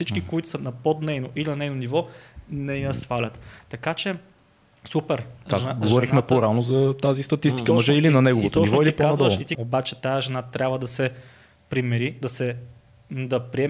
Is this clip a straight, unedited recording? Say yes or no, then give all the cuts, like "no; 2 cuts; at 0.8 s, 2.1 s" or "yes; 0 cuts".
no; 1 cut; at 9.5 s